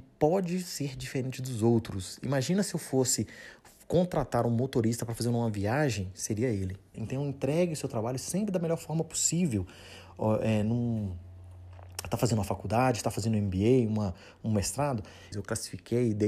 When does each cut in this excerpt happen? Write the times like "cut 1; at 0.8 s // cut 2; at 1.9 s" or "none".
cut 1; at 6.9 s // cut 2; at 15.3 s